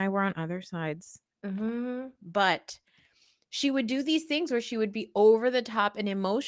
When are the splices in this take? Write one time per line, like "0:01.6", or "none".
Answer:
none